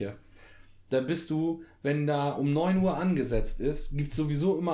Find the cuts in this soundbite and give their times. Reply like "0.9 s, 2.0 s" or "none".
none